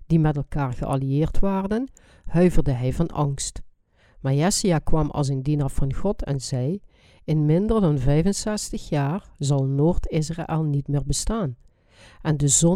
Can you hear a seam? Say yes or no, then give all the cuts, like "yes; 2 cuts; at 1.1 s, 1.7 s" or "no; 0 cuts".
no; 0 cuts